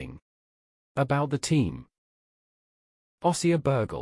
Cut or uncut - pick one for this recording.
uncut